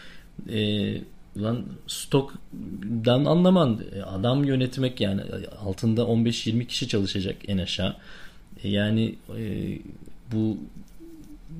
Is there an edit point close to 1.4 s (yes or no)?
yes